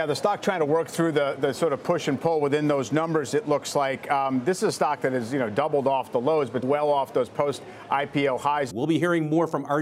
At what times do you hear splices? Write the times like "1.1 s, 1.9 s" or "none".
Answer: 6.6 s, 8.7 s